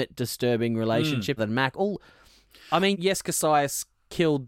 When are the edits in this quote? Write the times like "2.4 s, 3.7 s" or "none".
1.4 s, 2.9 s